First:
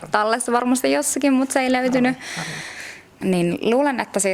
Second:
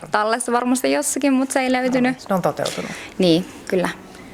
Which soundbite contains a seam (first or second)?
second